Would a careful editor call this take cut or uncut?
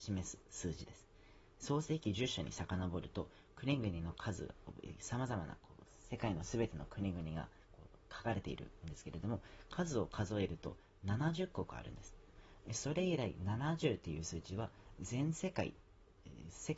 uncut